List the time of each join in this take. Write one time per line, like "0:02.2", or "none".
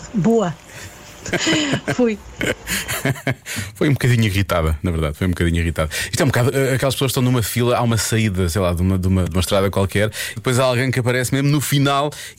0:09.2
0:10.4